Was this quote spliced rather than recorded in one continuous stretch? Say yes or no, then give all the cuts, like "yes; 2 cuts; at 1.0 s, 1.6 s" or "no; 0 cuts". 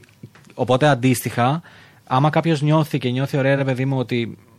no; 0 cuts